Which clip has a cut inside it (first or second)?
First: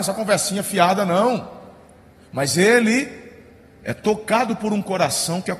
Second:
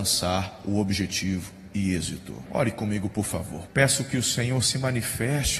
second